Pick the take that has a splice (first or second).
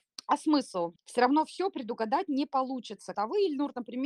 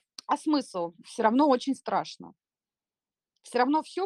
first